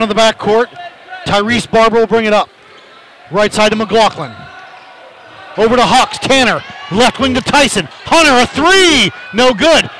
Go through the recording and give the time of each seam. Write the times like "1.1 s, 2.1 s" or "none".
5.5 s

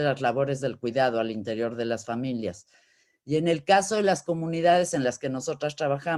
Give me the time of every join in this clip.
none

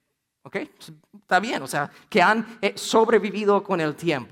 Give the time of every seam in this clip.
none

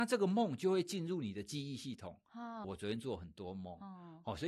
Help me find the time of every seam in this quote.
2.6 s

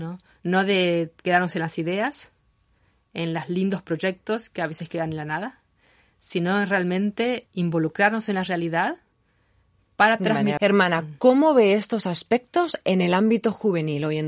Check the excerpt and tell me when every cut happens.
7.5 s, 10.6 s

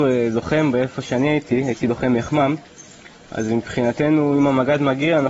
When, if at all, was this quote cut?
none

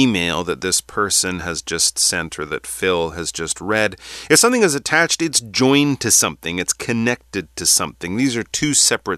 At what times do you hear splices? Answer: none

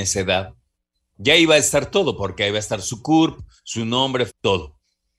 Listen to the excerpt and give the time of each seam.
1.1 s, 4.3 s

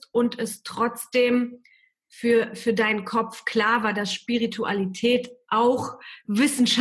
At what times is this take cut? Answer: none

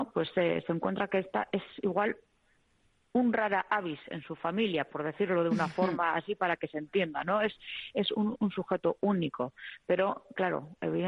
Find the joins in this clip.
none

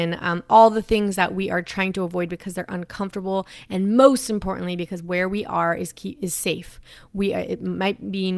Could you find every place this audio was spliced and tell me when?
none

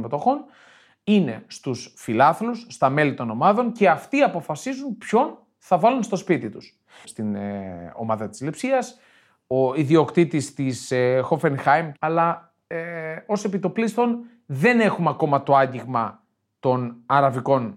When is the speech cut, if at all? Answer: 7.0 s, 12.0 s

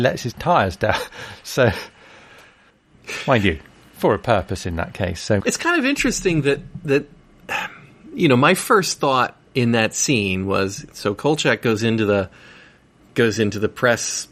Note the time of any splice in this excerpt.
5.4 s, 9.5 s

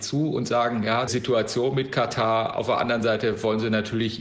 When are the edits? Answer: 1.1 s

